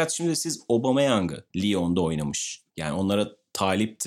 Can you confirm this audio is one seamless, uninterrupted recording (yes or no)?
no